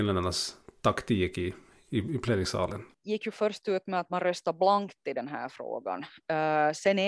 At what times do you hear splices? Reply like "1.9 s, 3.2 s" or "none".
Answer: none